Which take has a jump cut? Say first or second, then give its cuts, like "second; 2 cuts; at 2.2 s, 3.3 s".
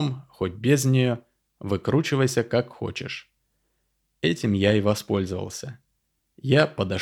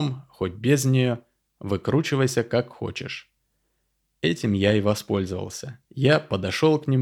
second; 1 cut; at 5.8 s